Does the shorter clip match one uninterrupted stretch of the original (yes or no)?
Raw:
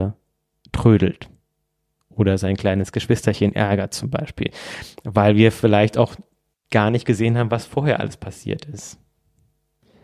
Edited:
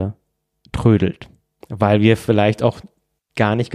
no